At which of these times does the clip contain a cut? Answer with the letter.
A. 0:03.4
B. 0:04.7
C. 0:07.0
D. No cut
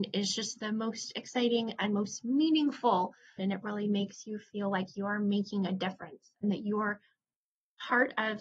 A